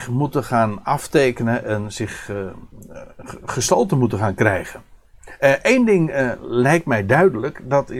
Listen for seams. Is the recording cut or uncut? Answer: uncut